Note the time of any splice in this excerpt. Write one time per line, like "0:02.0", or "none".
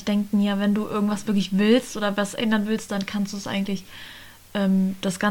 none